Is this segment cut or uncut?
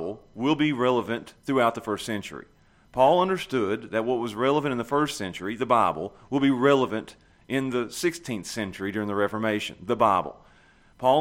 uncut